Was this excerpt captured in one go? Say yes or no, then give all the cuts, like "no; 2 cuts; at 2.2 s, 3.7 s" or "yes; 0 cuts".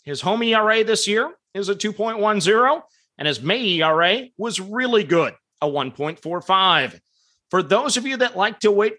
yes; 0 cuts